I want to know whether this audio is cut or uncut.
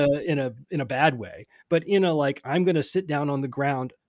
uncut